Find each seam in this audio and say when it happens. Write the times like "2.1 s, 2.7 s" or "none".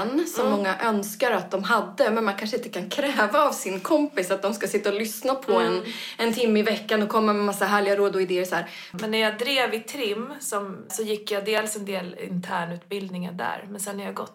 8.9 s, 10.9 s